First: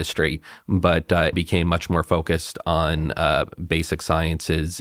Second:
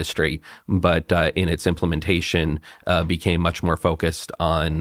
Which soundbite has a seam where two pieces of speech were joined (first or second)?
first